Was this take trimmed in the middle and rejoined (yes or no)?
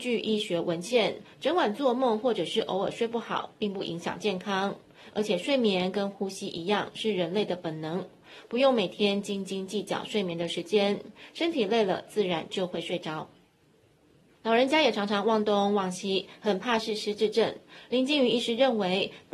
no